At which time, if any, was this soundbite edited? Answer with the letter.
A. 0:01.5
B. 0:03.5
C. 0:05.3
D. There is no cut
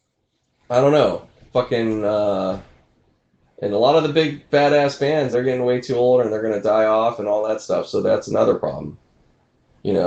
C